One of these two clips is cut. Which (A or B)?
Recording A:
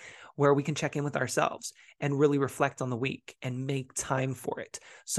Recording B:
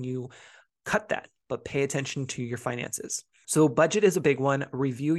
B